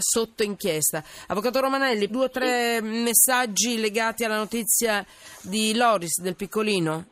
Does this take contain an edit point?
yes; 1 cut; at 2.1 s

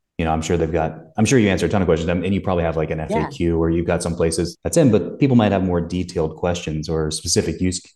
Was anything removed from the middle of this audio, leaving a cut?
no; 0 cuts

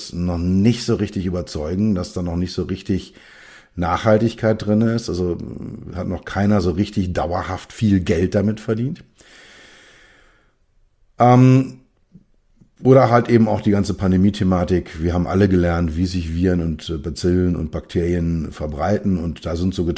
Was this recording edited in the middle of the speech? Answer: no; 0 cuts

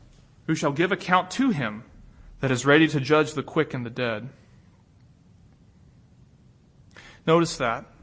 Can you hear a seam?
no; 0 cuts

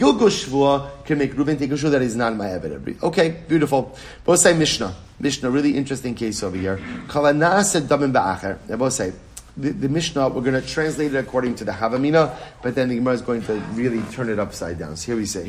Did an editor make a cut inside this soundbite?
no; 0 cuts

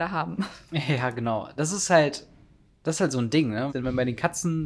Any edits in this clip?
yes; 1 cut; at 3.7 s

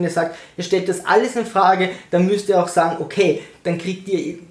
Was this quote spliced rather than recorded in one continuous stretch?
no; 0 cuts

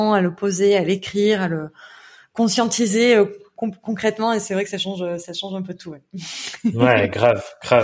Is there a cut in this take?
no; 0 cuts

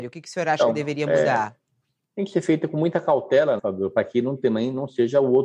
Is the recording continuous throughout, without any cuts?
no; 1 cut; at 3.6 s

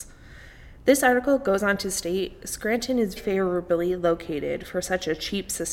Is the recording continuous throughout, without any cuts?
no; 1 cut; at 3.2 s

